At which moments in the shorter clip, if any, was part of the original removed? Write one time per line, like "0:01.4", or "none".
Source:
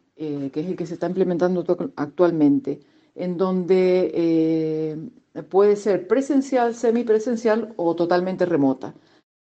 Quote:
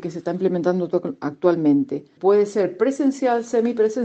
0:02.2